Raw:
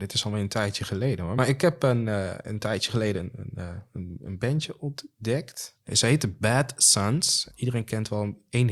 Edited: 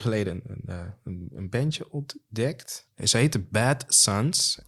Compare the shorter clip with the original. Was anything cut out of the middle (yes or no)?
no